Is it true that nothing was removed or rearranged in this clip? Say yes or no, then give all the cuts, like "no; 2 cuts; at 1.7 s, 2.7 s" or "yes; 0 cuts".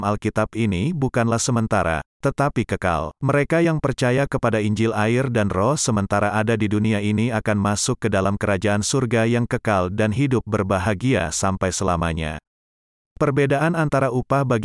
no; 1 cut; at 3.2 s